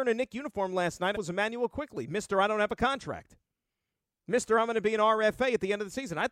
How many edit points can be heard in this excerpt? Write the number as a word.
one